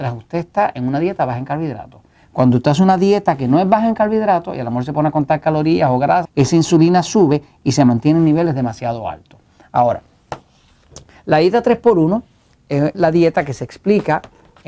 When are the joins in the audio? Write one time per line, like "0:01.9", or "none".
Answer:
0:06.2
0:12.9